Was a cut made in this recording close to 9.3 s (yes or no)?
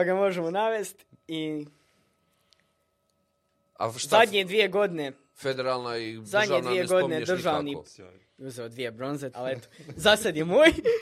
yes